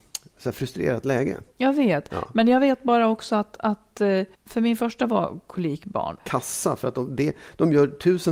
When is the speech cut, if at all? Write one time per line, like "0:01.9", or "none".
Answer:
0:04.3
0:06.2